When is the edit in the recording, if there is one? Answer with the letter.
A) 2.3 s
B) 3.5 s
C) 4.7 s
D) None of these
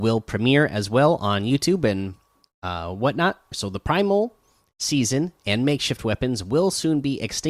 B